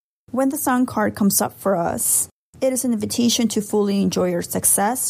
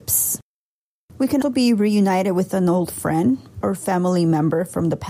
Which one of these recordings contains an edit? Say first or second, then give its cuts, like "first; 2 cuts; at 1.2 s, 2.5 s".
second; 2 cuts; at 1.4 s, 3.6 s